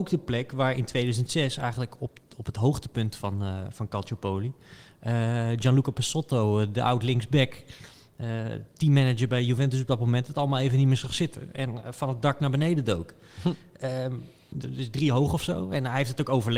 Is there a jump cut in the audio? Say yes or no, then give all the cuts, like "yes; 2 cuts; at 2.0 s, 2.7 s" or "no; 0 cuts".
yes; 1 cut; at 14.5 s